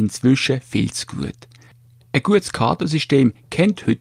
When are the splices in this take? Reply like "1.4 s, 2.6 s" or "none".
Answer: none